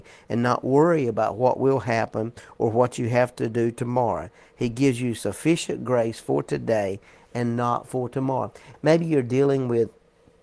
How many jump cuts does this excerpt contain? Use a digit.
1